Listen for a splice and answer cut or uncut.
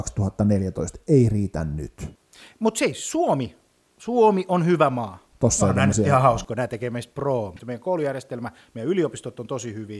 cut